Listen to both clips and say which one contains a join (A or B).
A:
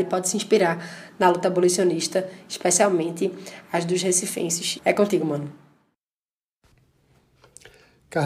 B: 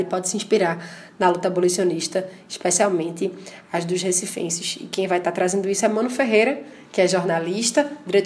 A